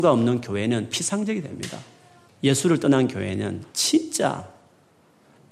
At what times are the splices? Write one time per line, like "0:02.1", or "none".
0:02.2
0:03.7

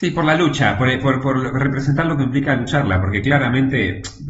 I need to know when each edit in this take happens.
none

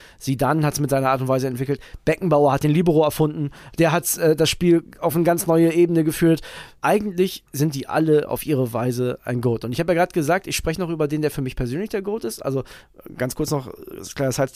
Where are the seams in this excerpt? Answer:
none

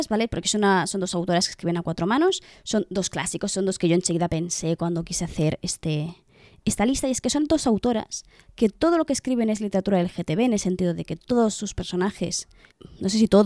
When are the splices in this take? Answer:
none

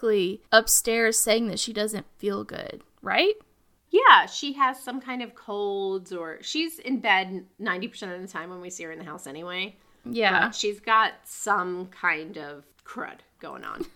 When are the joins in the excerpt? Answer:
none

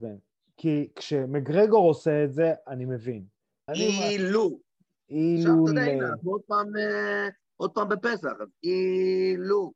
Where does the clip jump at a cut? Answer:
0:03.7

